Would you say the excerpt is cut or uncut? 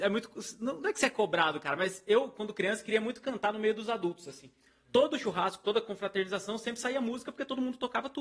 uncut